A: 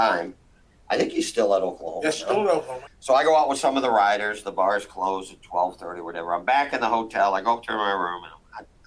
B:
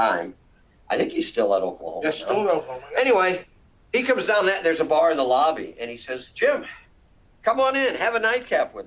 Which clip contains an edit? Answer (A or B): A